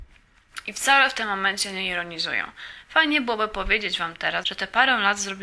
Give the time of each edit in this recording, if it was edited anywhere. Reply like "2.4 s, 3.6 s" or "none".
4.4 s